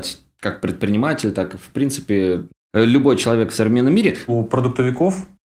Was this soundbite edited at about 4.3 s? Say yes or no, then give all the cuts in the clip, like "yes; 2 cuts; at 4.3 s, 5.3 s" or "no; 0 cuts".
yes; 1 cut; at 4.3 s